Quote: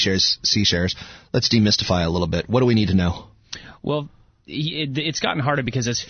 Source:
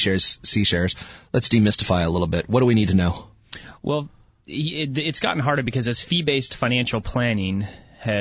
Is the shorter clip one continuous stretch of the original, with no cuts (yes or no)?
yes